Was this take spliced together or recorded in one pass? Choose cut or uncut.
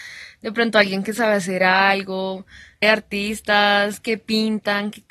cut